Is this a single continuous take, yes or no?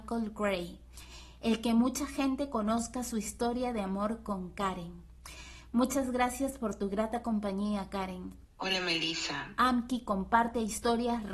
no